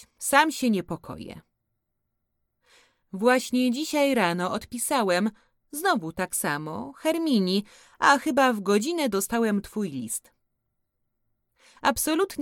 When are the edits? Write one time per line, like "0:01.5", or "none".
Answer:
none